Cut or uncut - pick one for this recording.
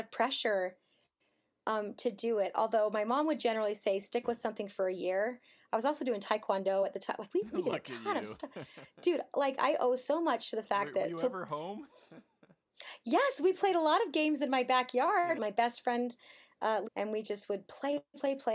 cut